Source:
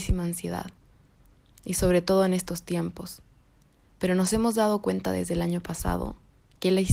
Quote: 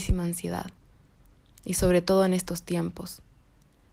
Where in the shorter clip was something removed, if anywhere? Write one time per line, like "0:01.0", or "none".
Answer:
none

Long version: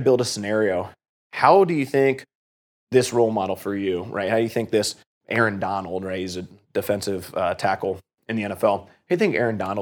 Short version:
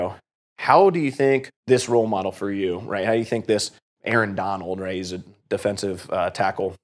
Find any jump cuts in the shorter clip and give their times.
0:01.6

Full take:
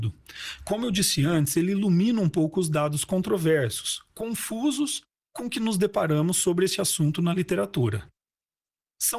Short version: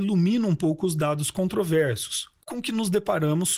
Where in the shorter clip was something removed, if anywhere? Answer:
0:02.4

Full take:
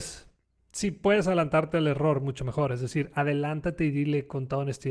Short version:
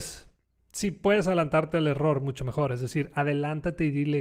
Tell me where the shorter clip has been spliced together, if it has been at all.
none

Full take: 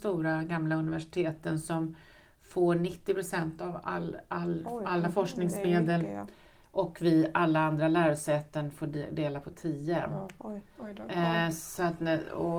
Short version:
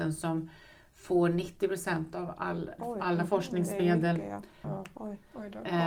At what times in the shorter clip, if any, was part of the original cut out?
0:02.8
0:04.6

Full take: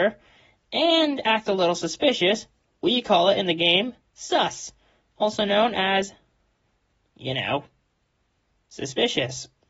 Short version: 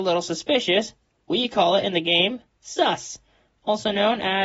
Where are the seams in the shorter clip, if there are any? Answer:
none

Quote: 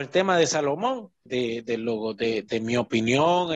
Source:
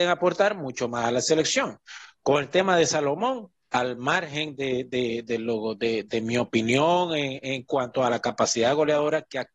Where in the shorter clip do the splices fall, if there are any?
0:01.3

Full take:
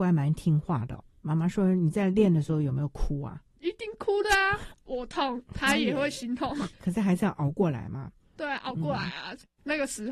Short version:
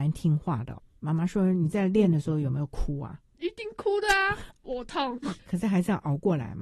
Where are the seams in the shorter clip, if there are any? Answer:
0:05.2

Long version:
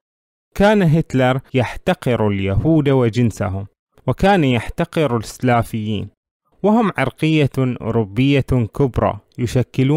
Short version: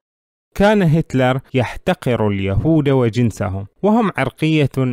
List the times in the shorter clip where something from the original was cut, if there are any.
0:03.8

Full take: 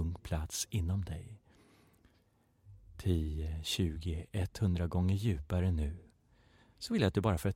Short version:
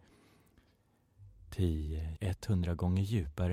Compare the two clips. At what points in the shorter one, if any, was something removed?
0:02.2

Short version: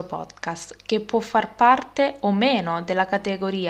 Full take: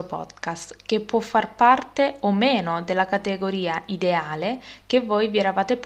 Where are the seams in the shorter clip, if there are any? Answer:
none

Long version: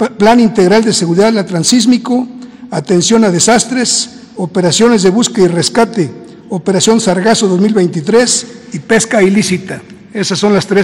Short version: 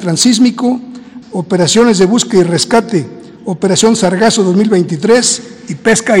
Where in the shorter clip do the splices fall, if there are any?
0:01.2

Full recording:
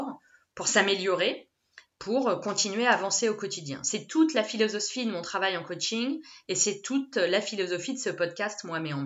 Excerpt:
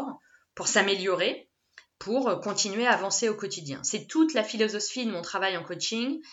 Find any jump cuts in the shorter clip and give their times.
none

